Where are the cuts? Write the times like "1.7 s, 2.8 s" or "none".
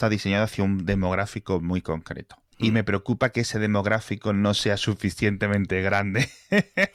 2.5 s